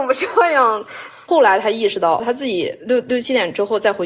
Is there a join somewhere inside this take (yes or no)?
yes